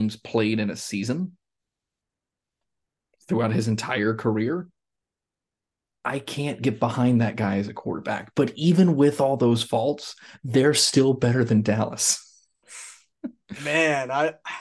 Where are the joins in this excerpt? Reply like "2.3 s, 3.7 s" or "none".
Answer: none